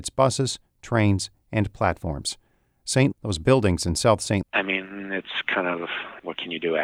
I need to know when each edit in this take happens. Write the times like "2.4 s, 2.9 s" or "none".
3.1 s, 4.4 s